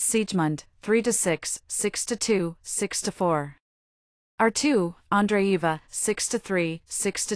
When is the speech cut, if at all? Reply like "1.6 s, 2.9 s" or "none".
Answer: none

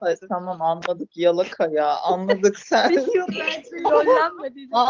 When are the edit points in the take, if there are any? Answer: 3.3 s

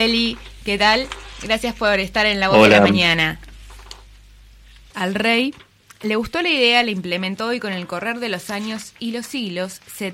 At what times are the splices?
4.9 s

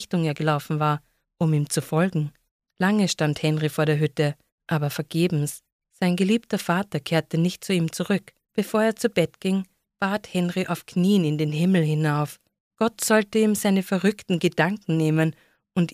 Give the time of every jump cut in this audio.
8.5 s

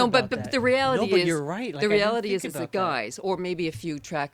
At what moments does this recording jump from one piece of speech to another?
none

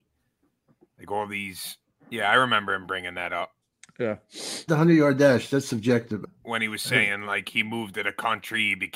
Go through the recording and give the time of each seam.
4.7 s, 6.2 s

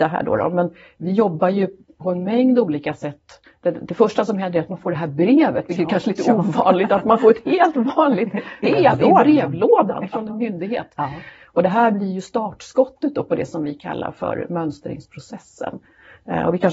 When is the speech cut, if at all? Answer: 8.6 s, 11.3 s

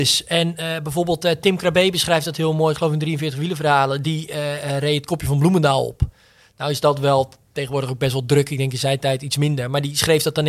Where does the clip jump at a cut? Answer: none

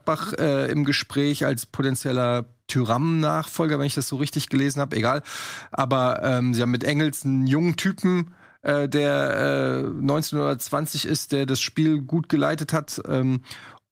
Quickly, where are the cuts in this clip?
none

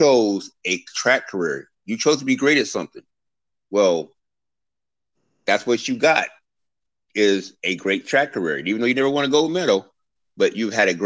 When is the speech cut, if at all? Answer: none

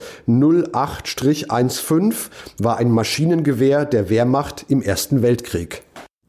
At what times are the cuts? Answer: none

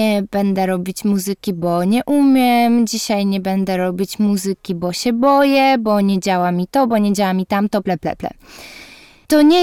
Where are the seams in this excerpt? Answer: 7.8 s

